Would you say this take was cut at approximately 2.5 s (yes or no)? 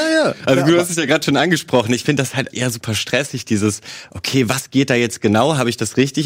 yes